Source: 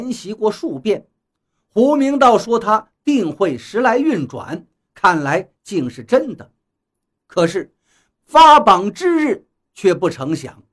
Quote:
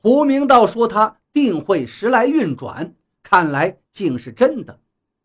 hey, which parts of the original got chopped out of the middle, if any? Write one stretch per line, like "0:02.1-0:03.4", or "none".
none